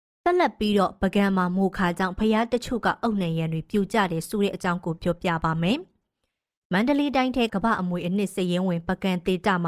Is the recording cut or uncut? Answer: cut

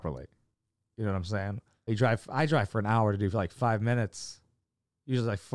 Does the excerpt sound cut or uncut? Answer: cut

